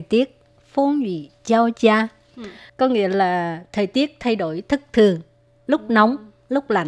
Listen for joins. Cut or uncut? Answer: cut